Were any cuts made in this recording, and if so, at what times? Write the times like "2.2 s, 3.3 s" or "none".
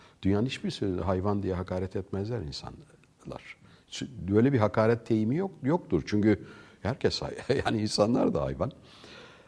none